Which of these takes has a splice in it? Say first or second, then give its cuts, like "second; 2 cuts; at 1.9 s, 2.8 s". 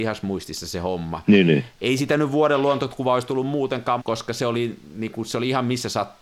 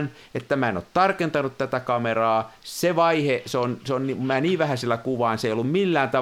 first; 2 cuts; at 1.8 s, 4.0 s